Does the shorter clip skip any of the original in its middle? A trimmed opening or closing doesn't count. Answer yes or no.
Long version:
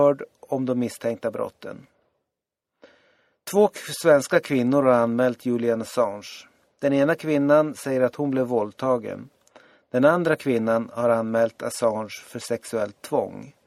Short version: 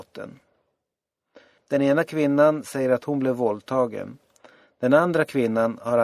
yes